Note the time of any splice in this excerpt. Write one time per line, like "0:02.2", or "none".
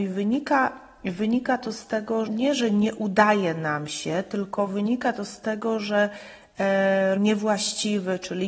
0:02.3
0:07.2